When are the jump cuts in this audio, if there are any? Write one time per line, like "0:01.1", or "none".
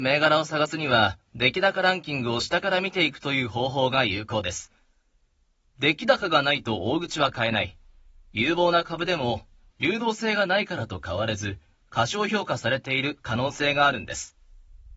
0:09.7